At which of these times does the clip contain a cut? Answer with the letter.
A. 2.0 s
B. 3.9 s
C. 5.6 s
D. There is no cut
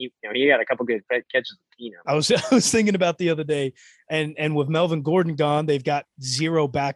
A